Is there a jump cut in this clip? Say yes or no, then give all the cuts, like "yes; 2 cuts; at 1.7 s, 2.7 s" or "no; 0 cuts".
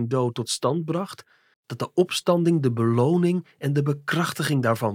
yes; 1 cut; at 1.5 s